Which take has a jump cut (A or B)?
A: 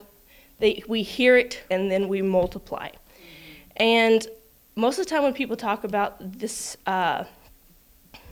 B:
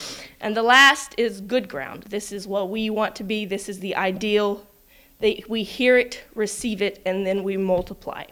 A